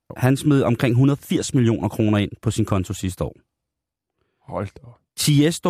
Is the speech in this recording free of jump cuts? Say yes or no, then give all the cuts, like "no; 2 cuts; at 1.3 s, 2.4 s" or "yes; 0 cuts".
yes; 0 cuts